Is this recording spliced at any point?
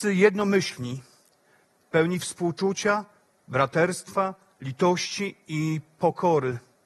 no; 0 cuts

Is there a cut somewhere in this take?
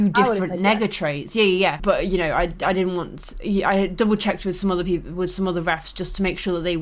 no; 0 cuts

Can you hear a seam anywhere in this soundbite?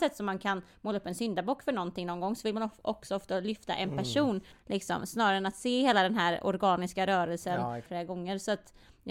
yes; 2 cuts; at 4.5 s, 7.9 s

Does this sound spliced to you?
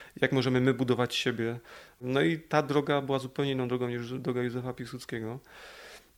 no; 0 cuts

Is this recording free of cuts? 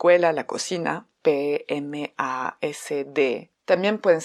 no; 1 cut; at 1.1 s

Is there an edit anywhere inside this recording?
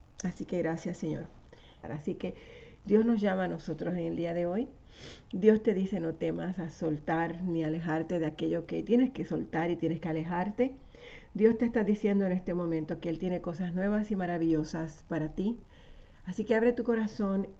yes; 1 cut; at 1.8 s

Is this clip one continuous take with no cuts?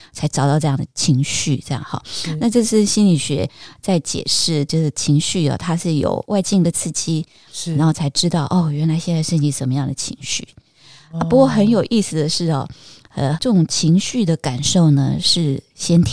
no; 2 cuts; at 7.5 s, 13.3 s

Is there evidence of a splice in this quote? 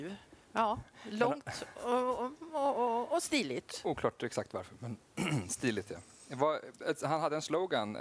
no; 0 cuts

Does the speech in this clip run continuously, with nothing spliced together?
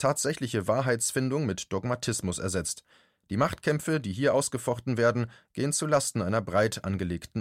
yes; 0 cuts

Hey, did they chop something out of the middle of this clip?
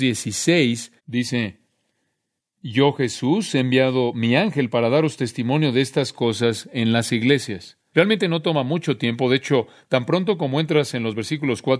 yes; 2 cuts; at 1.0 s, 7.9 s

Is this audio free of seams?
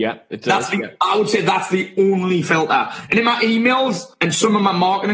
yes; 0 cuts

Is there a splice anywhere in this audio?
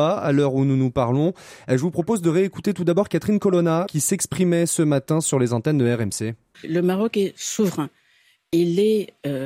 yes; 2 cuts; at 3.9 s, 6.5 s

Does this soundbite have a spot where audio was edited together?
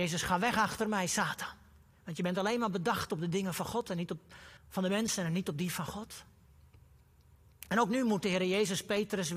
yes; 1 cut; at 4.6 s

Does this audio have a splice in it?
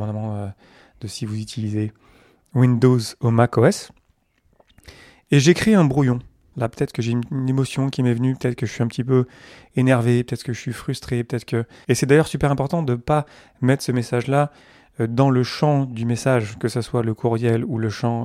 yes; 2 cuts; at 6.5 s, 11.8 s

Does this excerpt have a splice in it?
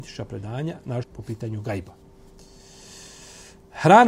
yes; 1 cut; at 1.0 s

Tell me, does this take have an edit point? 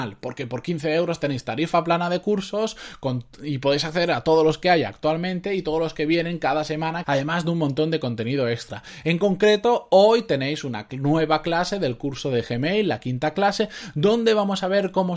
yes; 1 cut; at 7.0 s

